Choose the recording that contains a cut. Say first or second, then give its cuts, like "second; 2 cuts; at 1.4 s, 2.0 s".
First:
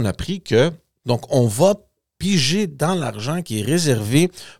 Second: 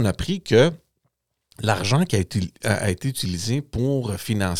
first; 1 cut; at 1.0 s